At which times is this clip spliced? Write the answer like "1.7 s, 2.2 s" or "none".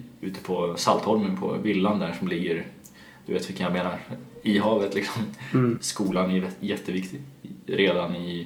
5.8 s